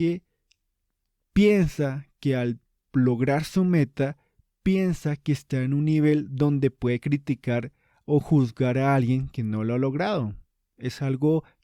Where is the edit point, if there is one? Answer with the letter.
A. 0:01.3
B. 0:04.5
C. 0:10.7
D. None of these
D